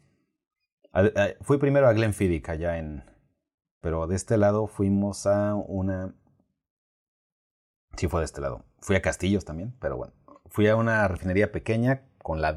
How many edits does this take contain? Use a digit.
1